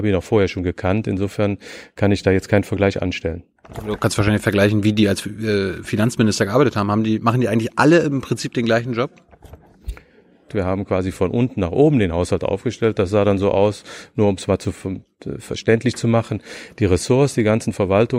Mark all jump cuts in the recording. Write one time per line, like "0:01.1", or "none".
0:10.5